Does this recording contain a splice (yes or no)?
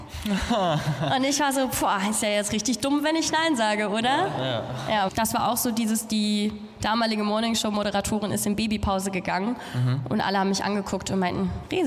yes